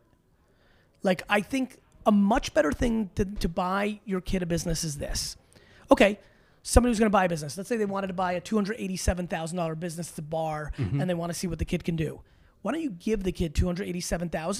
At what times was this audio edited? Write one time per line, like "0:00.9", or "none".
none

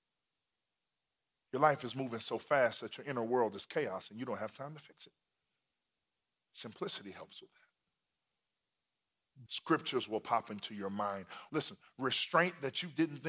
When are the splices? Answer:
0:09.5
0:11.5

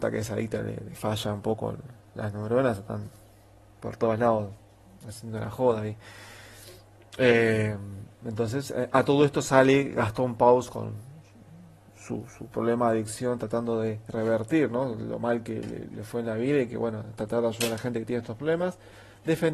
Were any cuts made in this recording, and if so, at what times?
none

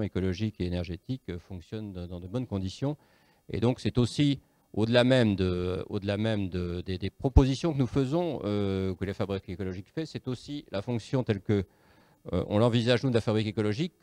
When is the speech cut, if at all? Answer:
none

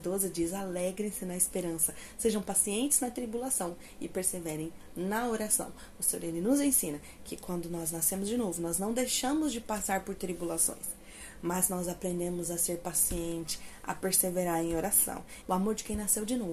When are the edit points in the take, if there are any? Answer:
0:15.4

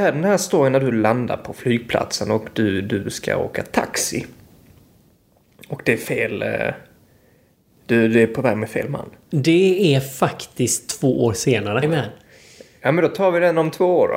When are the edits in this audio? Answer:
0:11.8

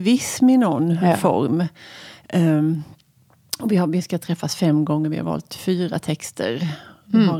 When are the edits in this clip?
none

